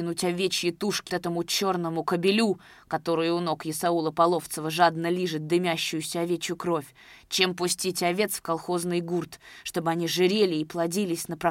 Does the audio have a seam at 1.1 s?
yes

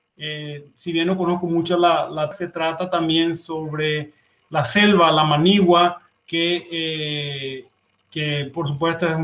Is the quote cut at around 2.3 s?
yes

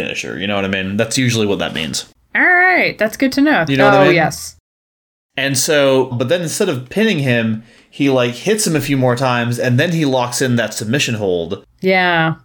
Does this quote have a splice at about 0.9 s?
no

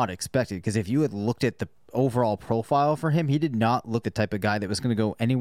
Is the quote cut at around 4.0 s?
yes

